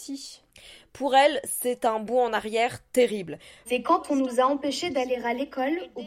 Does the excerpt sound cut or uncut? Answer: cut